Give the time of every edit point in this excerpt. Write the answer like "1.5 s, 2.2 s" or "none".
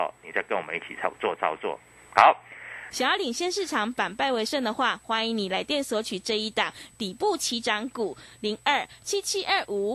2.9 s